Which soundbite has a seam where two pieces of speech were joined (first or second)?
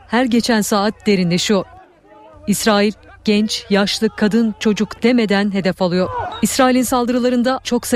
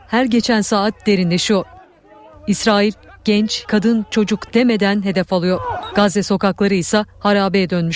second